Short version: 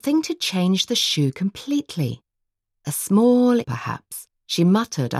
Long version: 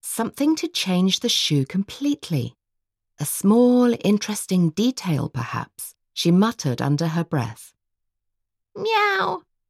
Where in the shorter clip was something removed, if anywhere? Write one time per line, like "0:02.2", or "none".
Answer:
0:03.6